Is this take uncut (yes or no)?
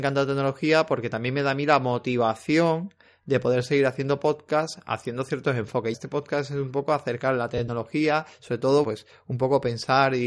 no